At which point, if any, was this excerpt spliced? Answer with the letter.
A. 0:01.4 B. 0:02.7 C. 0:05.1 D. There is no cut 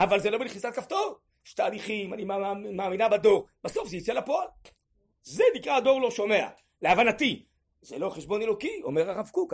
C